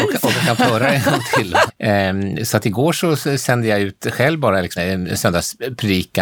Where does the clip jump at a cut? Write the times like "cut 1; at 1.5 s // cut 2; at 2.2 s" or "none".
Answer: cut 1; at 1.7 s // cut 2; at 4.8 s